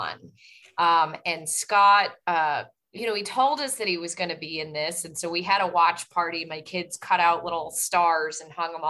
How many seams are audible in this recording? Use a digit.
0